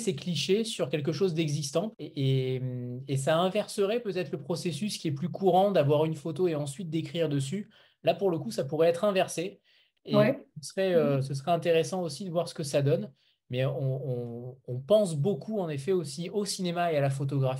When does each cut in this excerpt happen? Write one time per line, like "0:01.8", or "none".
0:01.9